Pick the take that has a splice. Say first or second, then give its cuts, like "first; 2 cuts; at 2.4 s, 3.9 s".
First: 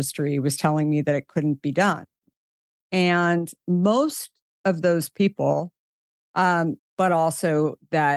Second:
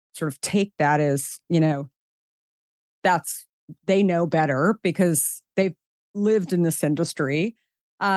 first; 2 cuts; at 2.8 s, 6.8 s